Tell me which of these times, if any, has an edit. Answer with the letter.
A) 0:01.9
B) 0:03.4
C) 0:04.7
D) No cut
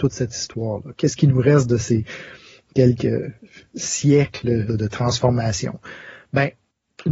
C